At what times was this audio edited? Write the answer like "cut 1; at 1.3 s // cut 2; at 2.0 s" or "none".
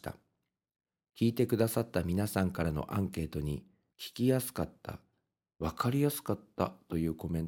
cut 1; at 3.9 s